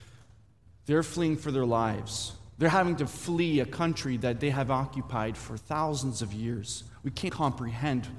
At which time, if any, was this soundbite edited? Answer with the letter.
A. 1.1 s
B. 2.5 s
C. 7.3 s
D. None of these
C